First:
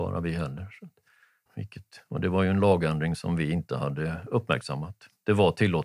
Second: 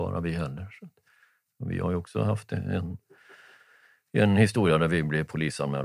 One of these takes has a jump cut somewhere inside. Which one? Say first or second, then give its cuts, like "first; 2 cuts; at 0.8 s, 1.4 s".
first; 1 cut; at 1.5 s